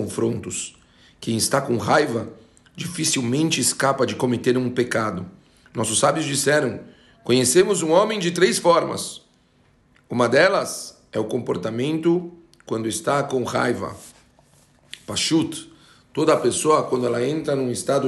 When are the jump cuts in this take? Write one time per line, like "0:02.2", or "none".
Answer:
none